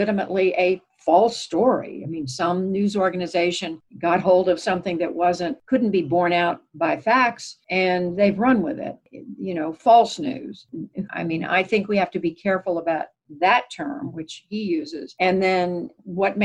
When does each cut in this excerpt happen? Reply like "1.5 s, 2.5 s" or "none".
11.1 s